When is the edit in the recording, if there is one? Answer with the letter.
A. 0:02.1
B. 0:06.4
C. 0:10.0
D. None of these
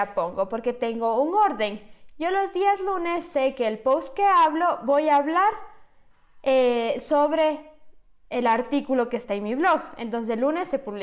D